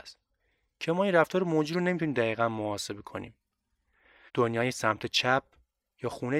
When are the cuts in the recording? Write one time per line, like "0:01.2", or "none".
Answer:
0:04.3